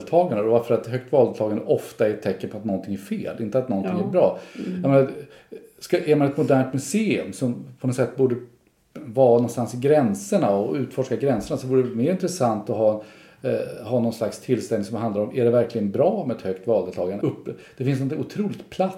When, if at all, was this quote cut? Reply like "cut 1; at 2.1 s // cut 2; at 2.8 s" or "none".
cut 1; at 17.2 s